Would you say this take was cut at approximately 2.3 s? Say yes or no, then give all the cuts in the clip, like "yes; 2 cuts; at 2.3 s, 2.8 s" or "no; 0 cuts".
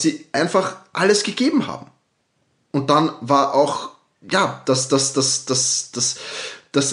no; 1 cut; at 5.9 s